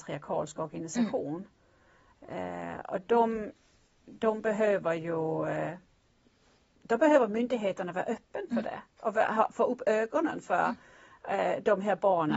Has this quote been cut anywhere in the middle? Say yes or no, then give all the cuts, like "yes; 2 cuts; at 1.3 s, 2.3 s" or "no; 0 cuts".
no; 0 cuts